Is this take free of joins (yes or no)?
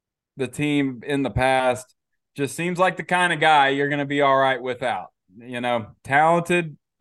yes